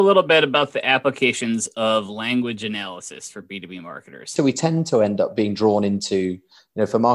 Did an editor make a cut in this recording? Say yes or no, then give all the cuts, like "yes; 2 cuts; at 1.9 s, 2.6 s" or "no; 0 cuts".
yes; 1 cut; at 4.4 s